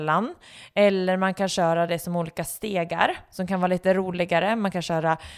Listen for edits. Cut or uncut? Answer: uncut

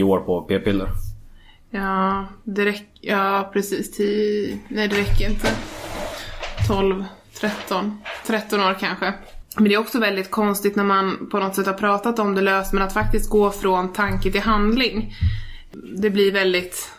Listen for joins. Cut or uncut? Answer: uncut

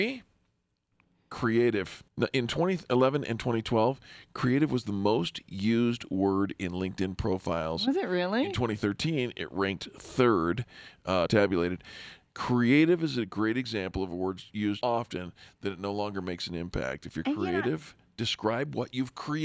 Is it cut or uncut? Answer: cut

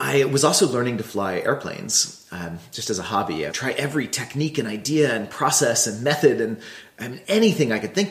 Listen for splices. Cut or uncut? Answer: cut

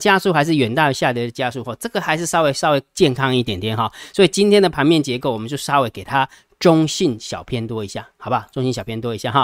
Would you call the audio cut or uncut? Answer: uncut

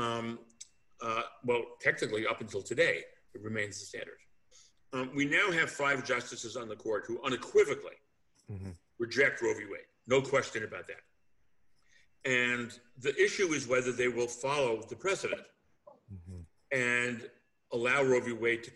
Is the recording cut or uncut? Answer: uncut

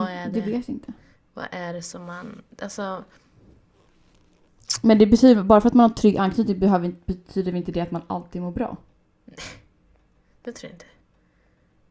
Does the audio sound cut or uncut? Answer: uncut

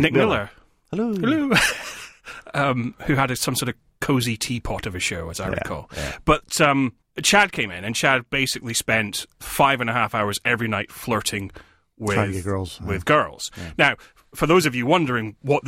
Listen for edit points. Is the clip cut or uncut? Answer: uncut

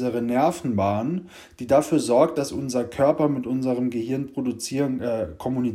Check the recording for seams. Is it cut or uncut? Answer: uncut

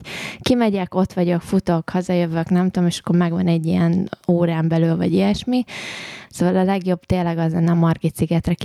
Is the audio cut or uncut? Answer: cut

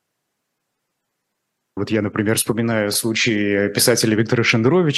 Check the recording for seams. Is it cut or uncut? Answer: cut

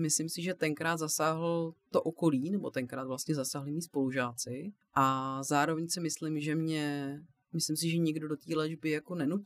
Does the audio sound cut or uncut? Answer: cut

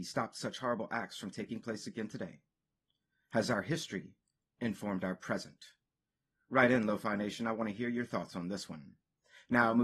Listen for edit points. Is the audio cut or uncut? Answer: uncut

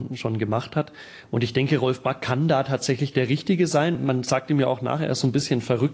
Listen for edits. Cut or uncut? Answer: uncut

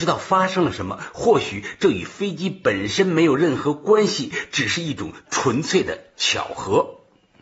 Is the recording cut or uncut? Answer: uncut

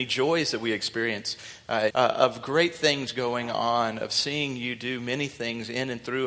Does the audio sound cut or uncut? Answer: cut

